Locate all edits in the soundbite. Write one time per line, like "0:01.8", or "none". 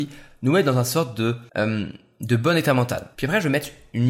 0:01.5
0:03.1